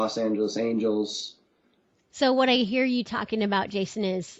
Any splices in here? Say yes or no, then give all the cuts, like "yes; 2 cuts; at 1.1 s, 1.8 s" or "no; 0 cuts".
no; 0 cuts